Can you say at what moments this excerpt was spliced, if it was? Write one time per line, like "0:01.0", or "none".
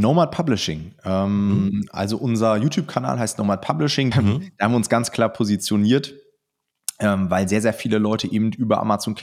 0:04.1

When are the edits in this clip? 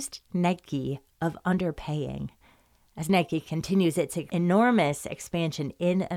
none

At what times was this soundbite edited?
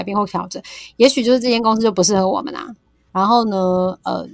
0:03.1

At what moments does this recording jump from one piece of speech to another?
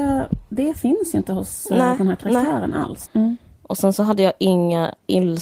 0:03.1

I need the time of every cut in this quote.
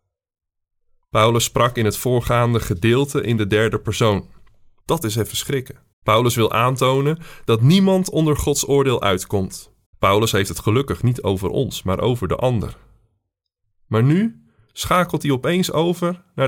0:04.8
0:05.9
0:09.9

